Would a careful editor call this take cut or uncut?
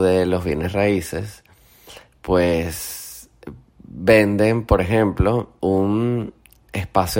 uncut